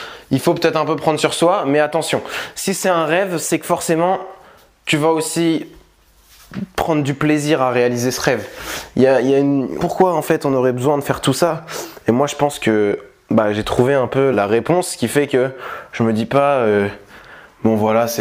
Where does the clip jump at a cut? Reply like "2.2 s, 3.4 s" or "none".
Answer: 9.8 s, 14.3 s